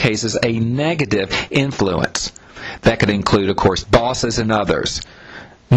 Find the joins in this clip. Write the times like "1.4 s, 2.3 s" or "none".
3.8 s